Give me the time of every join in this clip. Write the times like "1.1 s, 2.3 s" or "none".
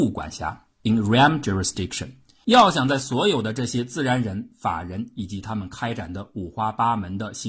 2.4 s